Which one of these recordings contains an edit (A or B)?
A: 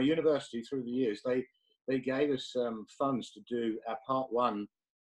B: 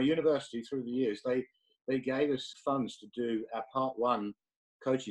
B